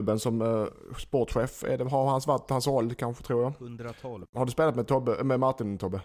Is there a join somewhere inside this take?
yes; 1 cut; at 4.2 s

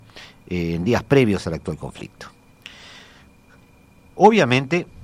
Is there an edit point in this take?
no; 0 cuts

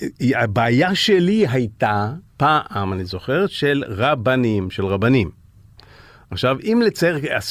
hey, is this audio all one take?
no; 1 cut; at 2.3 s

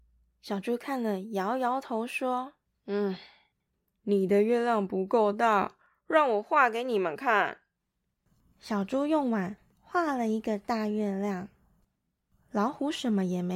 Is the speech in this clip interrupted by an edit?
no; 0 cuts

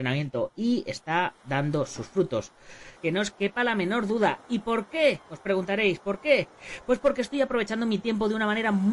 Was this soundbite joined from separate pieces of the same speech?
yes; 1 cut; at 3.0 s

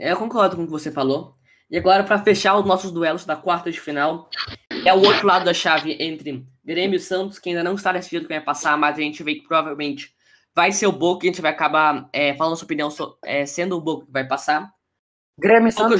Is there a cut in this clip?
no; 0 cuts

